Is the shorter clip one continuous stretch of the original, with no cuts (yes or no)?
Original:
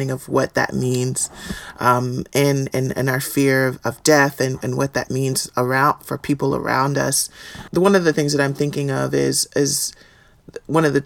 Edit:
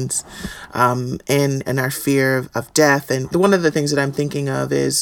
no